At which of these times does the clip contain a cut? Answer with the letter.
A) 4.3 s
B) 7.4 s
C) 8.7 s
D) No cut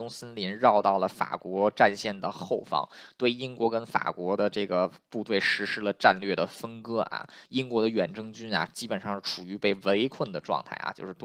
B